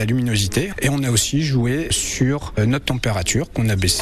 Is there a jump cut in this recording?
no; 0 cuts

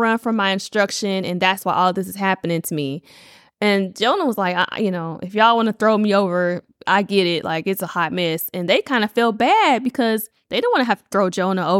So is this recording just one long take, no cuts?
yes; 0 cuts

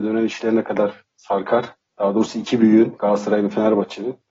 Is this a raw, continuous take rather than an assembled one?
no; 1 cut; at 1.9 s

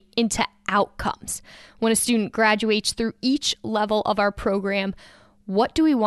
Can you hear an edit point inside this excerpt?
no; 0 cuts

